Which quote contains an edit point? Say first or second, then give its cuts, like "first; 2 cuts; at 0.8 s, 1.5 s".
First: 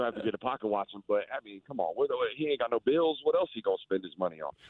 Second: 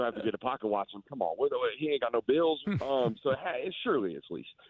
second; 2 cuts; at 1.0 s, 2.6 s